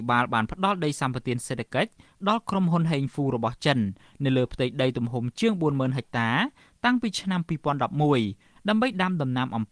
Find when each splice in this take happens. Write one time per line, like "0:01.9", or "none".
none